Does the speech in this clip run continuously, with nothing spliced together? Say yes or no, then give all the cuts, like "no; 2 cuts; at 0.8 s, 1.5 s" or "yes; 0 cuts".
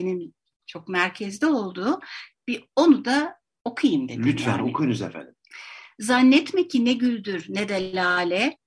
yes; 0 cuts